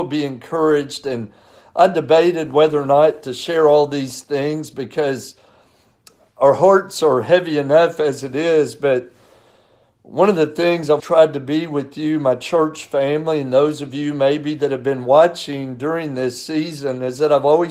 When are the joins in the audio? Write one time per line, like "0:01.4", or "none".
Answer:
0:11.0

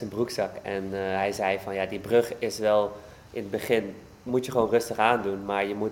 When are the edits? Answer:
none

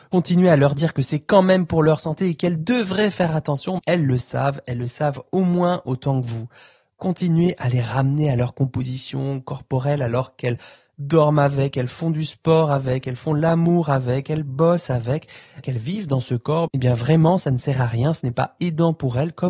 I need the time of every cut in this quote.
0:03.8
0:15.6
0:16.7

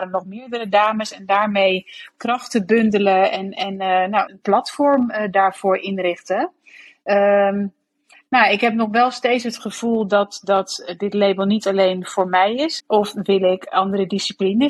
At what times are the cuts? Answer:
0:04.3
0:12.8

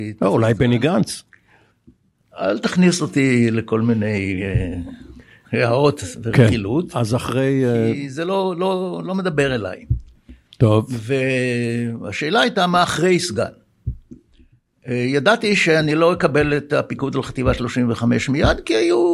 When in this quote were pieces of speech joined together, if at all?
none

